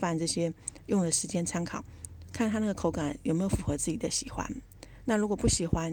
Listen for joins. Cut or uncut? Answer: cut